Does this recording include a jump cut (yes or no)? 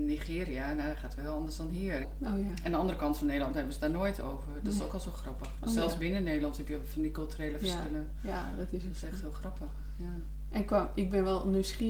yes